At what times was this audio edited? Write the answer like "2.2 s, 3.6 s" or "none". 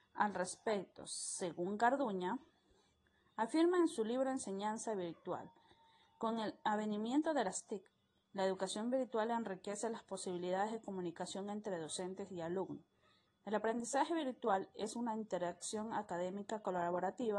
13.3 s